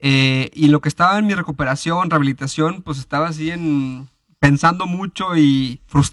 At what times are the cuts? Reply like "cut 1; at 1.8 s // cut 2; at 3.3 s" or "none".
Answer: none